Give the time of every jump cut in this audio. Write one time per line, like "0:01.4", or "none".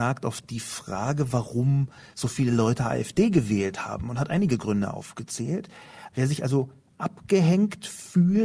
0:06.1